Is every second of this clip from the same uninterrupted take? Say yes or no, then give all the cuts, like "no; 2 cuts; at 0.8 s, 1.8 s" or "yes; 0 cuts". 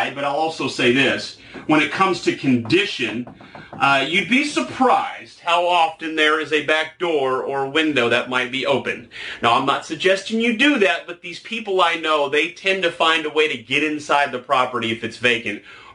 yes; 0 cuts